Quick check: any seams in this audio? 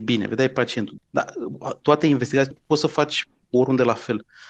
yes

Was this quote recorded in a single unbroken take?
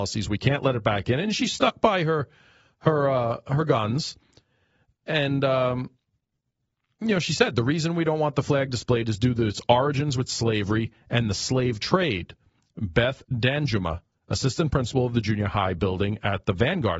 yes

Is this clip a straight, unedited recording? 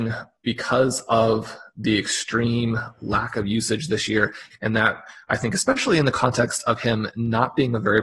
yes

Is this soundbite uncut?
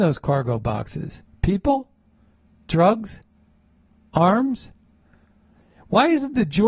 yes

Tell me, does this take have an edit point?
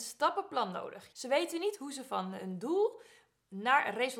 yes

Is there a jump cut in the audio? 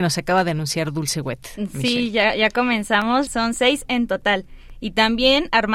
yes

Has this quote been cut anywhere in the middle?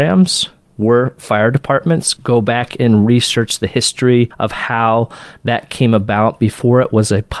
no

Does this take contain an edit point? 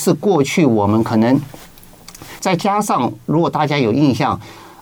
yes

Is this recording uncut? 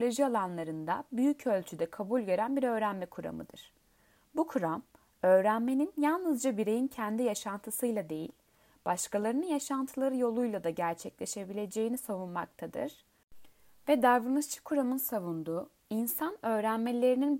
yes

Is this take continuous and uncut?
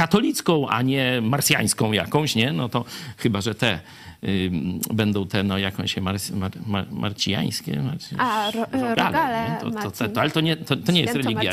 yes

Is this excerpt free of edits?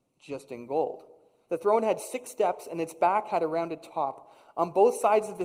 no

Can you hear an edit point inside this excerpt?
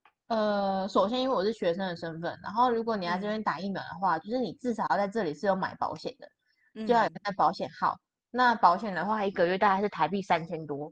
no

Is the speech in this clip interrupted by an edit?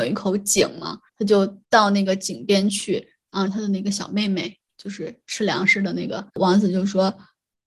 yes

